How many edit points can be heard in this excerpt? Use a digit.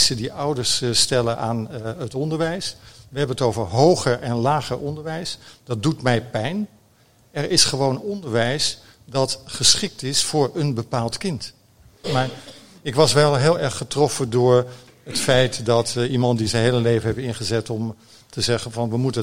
1